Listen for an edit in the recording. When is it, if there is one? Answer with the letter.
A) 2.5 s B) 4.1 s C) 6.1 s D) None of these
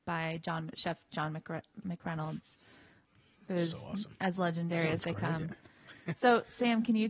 D